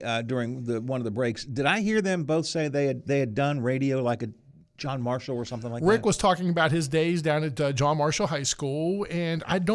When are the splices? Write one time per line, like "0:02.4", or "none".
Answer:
none